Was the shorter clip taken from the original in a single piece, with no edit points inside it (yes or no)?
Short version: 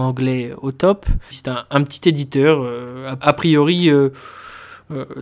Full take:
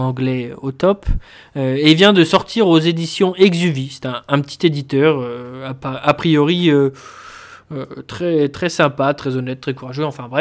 no